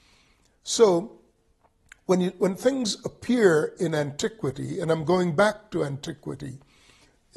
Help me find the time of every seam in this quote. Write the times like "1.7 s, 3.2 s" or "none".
none